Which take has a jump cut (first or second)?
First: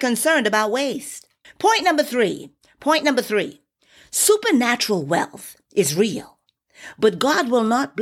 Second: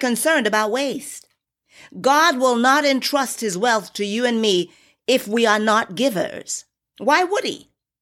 first